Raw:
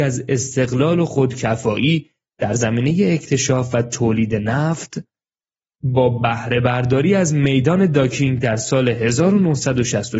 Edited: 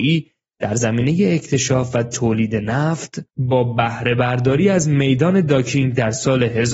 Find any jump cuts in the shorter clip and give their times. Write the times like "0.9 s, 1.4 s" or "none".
3.3 s